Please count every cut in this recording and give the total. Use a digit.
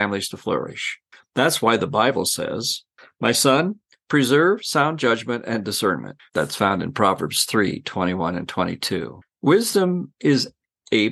1